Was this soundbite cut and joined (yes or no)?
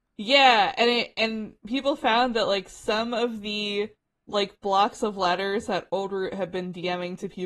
no